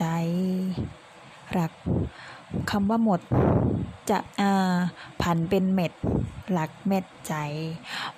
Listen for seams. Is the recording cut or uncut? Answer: cut